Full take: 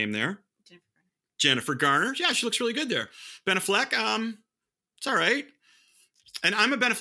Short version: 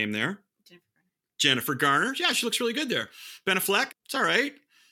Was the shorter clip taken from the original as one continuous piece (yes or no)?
no